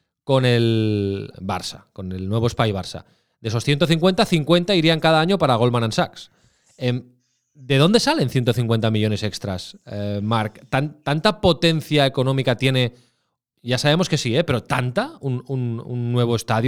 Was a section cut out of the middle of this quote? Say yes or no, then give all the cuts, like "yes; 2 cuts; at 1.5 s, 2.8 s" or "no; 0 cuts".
yes; 1 cut; at 1.3 s